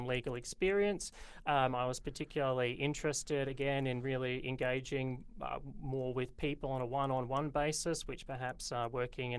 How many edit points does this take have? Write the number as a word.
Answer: zero